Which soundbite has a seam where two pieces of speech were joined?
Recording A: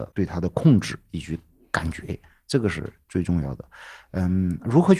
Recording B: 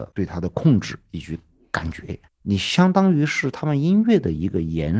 B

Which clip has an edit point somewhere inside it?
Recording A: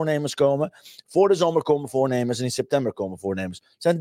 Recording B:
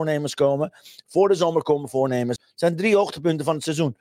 B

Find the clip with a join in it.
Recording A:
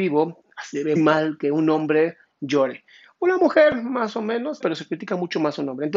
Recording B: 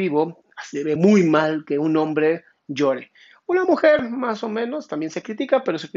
A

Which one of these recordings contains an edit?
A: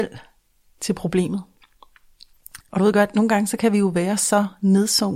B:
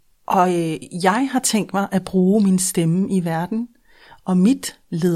A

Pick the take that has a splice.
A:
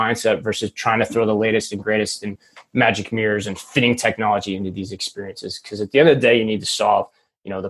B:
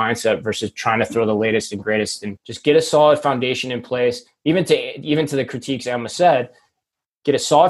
B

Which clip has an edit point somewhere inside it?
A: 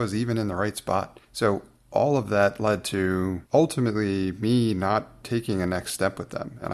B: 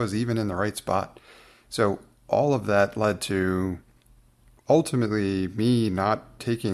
A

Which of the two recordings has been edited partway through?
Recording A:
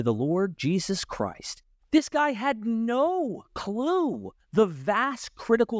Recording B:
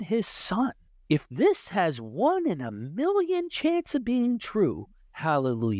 A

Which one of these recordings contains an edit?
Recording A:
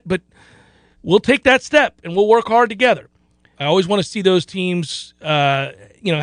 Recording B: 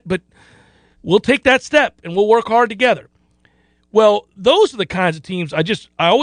A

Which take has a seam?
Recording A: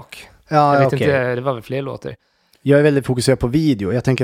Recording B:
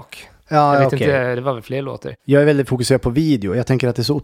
B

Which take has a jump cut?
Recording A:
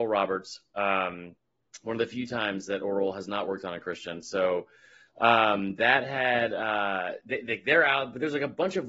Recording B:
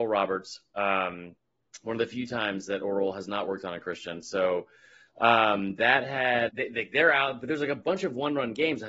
B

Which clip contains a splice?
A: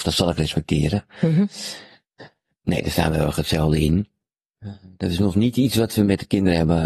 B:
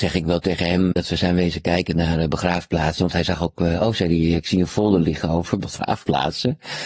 B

